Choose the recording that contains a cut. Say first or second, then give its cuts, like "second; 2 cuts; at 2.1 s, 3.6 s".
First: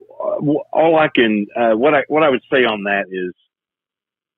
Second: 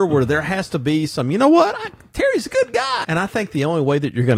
second; 1 cut; at 3.0 s